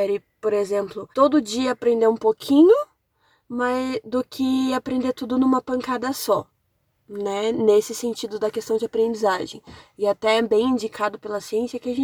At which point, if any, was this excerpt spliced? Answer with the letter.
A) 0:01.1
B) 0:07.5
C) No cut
A